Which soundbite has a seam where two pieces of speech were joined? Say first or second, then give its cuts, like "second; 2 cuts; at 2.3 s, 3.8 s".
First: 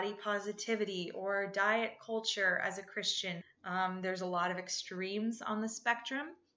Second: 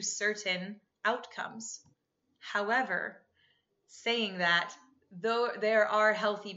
first; 1 cut; at 3.4 s